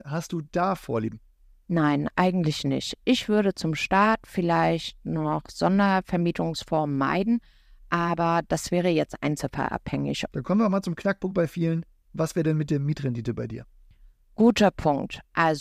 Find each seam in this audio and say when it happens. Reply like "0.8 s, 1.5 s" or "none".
10.3 s